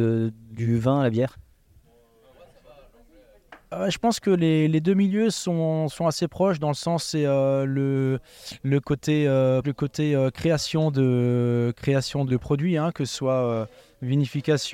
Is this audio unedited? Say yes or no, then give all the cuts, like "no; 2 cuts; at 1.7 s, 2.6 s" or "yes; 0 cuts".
no; 2 cuts; at 9.6 s, 12.3 s